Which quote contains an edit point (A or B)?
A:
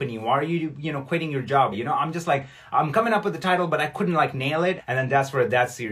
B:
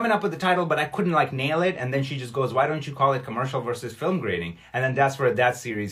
A